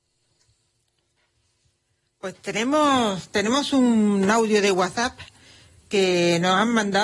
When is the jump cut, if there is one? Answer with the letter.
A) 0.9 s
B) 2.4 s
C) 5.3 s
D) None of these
D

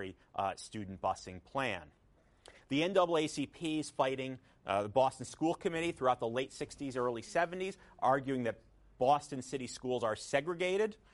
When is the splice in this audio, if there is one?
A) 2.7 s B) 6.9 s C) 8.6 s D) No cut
D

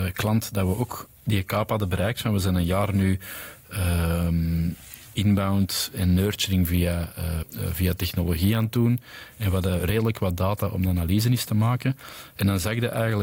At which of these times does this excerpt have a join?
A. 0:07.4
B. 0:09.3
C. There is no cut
A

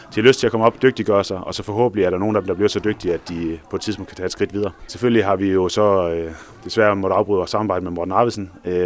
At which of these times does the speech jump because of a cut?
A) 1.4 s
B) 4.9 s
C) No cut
B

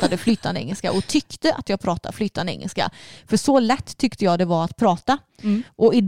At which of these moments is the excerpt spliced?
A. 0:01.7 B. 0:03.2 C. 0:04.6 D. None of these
D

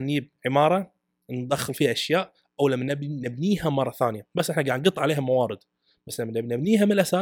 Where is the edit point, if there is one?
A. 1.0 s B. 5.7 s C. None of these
C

